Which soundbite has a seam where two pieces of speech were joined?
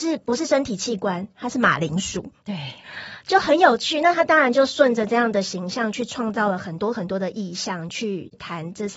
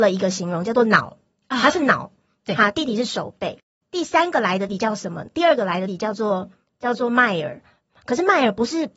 second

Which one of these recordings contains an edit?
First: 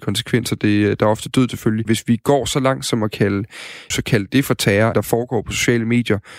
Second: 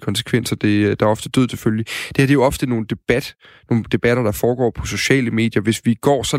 first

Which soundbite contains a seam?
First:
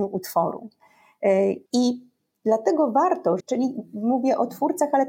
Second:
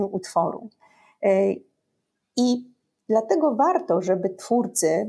first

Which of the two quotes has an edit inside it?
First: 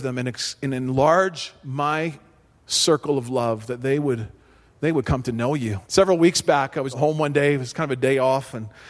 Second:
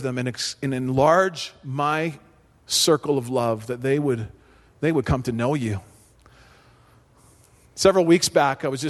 first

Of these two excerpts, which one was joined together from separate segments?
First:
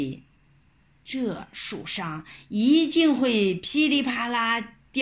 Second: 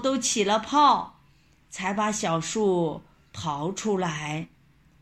first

